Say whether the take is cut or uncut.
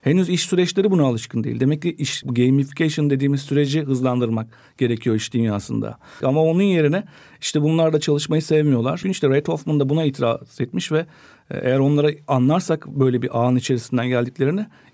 cut